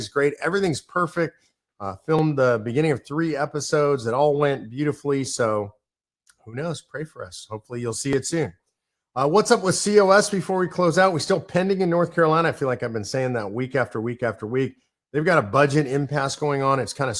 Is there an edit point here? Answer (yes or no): no